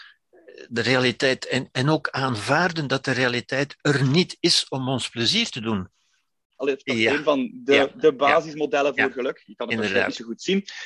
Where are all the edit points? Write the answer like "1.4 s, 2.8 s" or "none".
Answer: 6.6 s